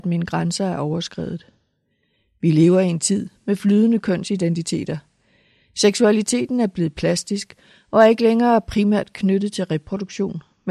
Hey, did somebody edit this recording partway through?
no; 0 cuts

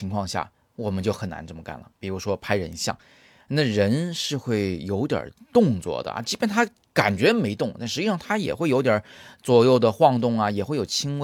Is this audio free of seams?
yes; 0 cuts

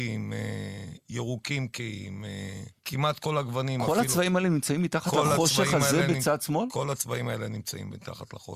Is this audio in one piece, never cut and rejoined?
no; 1 cut; at 2.8 s

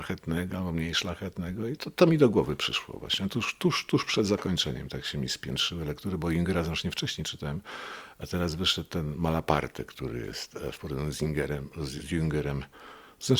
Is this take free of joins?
yes; 0 cuts

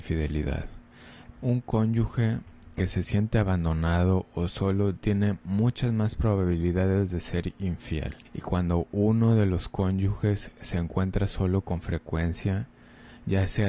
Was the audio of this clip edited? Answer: yes; 2 cuts; at 1.4 s, 8.3 s

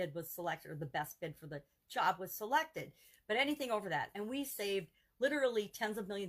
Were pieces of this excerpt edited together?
no; 0 cuts

